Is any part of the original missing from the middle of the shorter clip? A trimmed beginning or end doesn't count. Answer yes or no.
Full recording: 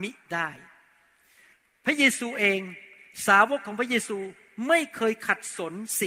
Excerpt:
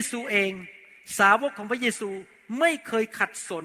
no